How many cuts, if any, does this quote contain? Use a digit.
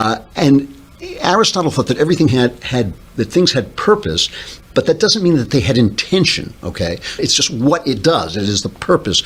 1